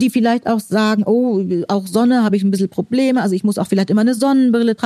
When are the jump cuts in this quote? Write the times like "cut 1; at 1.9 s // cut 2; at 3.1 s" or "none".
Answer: none